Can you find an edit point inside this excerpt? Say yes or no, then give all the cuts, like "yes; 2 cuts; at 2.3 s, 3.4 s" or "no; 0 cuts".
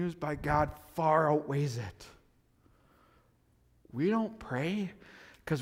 no; 0 cuts